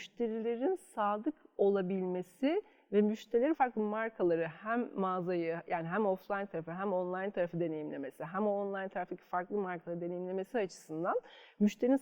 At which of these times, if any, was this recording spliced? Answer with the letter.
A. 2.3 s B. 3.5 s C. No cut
B